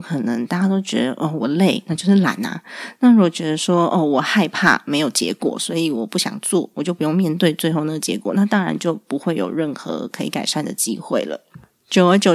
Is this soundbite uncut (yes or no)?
yes